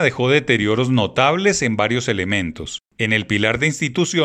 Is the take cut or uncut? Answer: uncut